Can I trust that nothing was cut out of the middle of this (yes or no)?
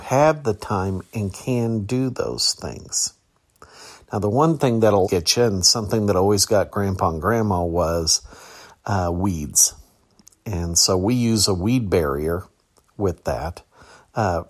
no